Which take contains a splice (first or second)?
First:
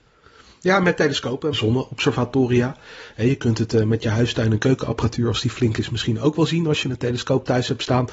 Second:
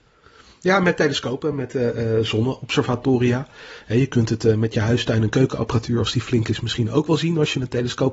first